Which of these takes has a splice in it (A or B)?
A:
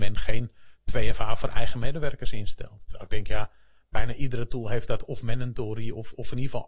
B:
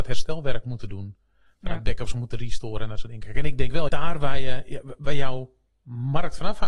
B